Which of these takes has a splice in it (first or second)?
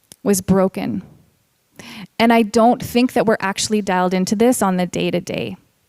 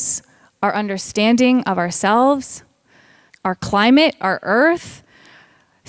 second